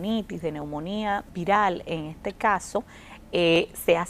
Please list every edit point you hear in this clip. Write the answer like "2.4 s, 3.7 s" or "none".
1.3 s